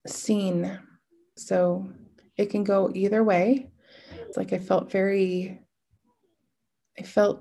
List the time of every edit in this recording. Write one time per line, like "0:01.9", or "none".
0:01.4
0:04.3